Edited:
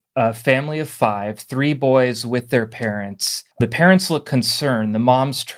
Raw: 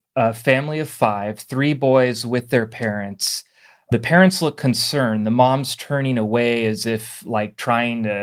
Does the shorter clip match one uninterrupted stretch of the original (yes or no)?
no